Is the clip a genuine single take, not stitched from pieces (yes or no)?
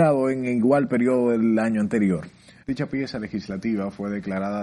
no